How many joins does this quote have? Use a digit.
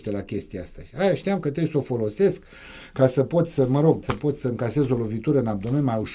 1